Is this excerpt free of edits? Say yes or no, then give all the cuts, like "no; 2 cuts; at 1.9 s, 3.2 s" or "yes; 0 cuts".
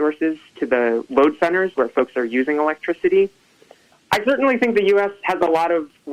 no; 1 cut; at 3.9 s